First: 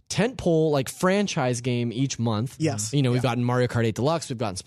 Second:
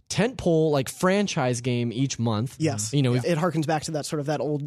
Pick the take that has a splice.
second; 1 cut; at 3.2 s

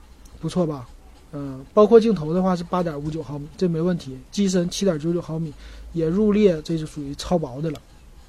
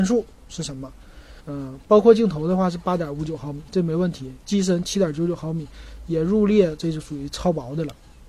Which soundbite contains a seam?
second; 1 cut; at 1.4 s

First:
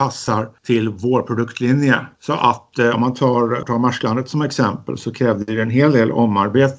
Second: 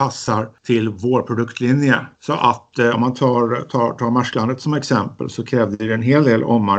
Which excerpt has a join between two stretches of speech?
first; 1 cut; at 3.6 s

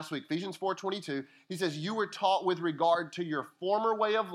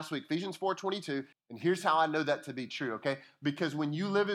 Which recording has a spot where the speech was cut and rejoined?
second; 1 cut; at 1.3 s

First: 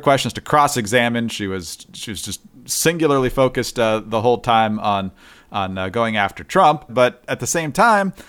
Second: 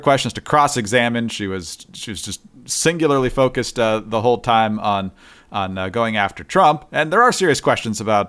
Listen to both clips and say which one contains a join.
first; 1 cut; at 6.9 s

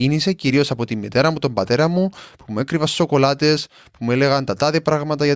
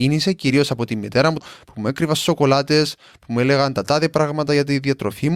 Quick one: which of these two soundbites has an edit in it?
second; 1 cut; at 1.4 s

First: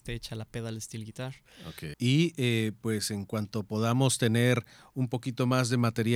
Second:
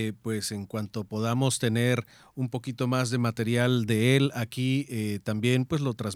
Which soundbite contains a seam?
first; 1 cut; at 1.9 s

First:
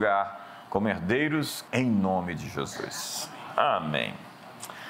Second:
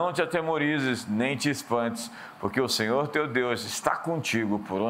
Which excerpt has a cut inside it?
first; 1 cut; at 1.7 s

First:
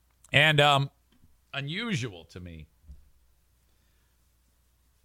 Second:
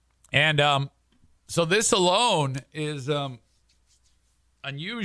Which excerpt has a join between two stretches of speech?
first; 1 cut; at 1.4 s

